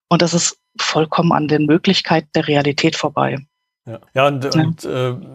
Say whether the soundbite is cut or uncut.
cut